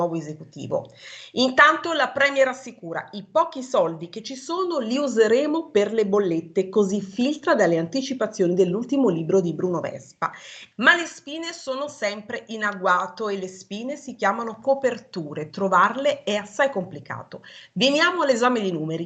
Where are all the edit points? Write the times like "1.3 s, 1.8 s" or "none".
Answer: 10.7 s